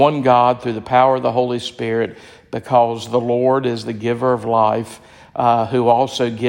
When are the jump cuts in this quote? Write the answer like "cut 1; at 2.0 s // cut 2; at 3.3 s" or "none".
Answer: none